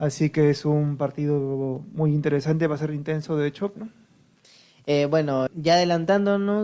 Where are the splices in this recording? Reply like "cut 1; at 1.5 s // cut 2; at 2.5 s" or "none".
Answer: cut 1; at 3.8 s // cut 2; at 5.5 s